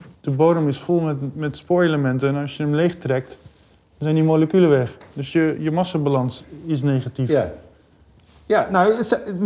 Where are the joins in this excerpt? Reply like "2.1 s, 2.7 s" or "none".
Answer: none